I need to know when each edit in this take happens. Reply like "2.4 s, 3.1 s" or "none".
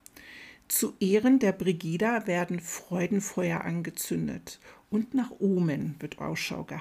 none

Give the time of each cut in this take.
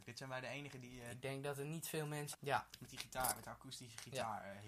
1.1 s, 2.3 s

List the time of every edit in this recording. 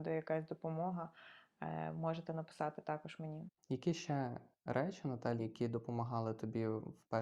3.6 s, 5.4 s

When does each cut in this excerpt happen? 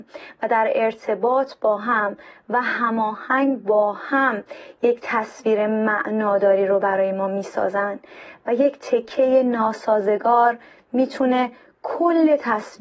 none

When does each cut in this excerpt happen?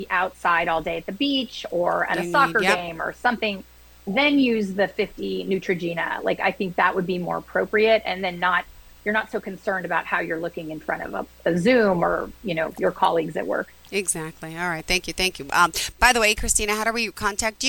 none

